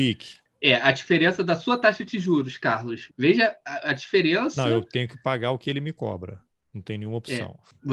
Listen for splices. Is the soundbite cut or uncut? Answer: cut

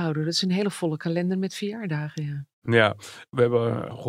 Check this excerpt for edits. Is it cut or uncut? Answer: uncut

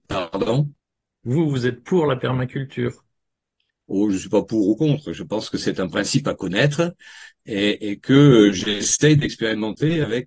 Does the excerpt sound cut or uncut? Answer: uncut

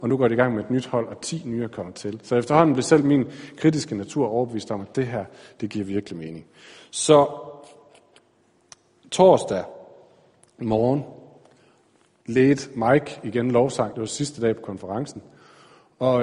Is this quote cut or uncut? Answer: uncut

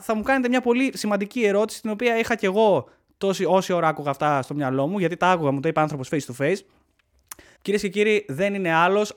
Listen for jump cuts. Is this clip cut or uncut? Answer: cut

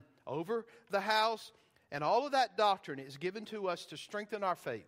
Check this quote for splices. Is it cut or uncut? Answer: uncut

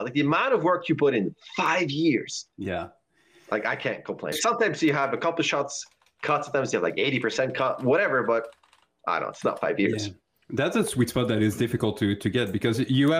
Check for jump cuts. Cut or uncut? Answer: cut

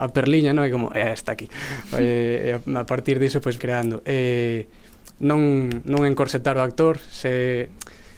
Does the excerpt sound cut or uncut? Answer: cut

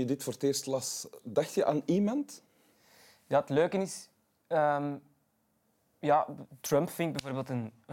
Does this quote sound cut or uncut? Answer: uncut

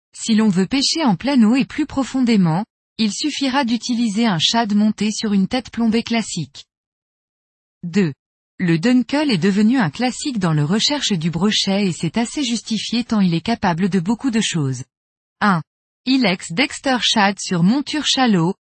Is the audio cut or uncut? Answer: cut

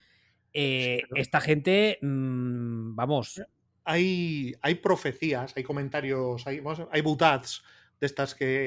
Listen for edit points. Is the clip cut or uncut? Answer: uncut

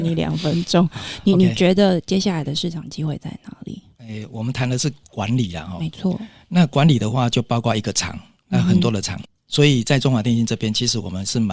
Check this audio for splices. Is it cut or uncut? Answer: uncut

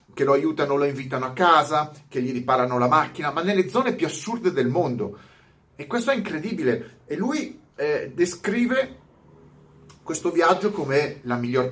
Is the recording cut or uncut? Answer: uncut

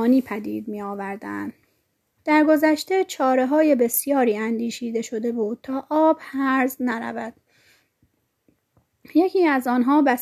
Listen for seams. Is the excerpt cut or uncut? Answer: cut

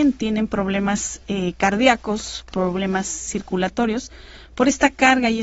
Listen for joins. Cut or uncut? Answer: uncut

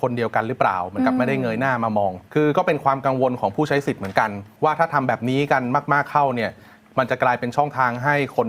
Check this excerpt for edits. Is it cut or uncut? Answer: cut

